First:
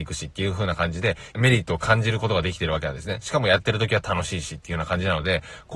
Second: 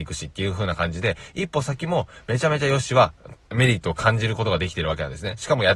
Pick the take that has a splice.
first; 1 cut; at 1.3 s

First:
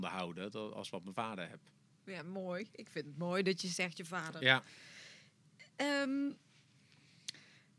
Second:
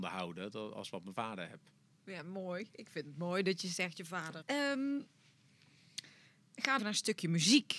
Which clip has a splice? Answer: second; 2 cuts; at 4.4 s, 6.8 s

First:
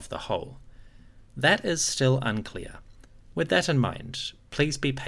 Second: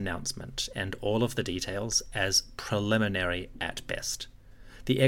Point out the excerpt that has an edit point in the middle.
first; 1 cut; at 3.3 s

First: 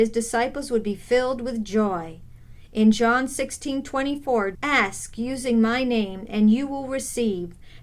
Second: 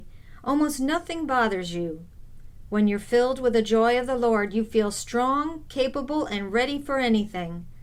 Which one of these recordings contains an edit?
first; 1 cut; at 4.5 s

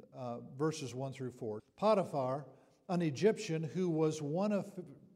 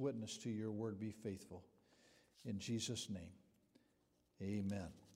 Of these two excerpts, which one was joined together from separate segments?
first; 1 cut; at 1.6 s

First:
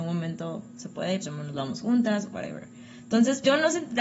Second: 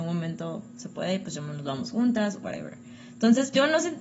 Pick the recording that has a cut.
first; 1 cut; at 1.2 s

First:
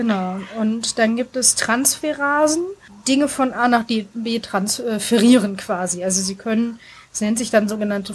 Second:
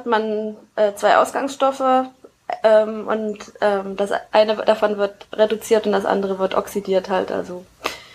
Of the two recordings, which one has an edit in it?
first; 1 cut; at 2.9 s

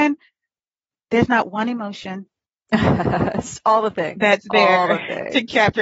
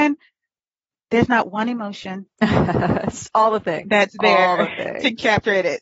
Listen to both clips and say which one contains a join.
second; 1 cut; at 2.3 s

